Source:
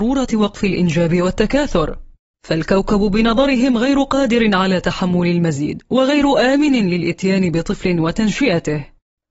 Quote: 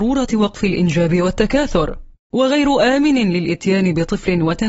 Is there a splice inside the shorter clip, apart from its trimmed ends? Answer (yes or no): yes